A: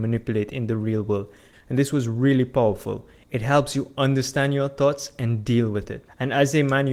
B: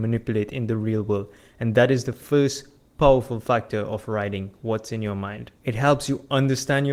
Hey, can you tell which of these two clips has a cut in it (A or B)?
A